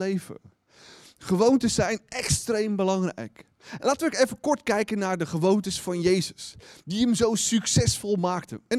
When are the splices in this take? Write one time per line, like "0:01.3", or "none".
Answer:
none